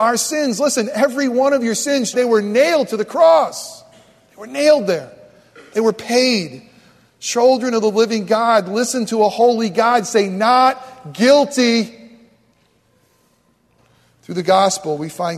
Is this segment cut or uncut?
cut